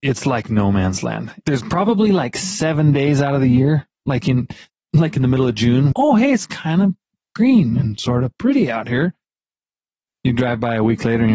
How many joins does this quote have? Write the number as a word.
two